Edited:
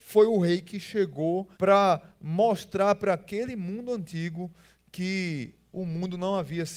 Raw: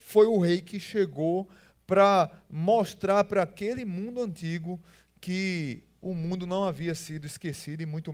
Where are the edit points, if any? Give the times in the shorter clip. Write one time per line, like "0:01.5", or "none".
0:01.5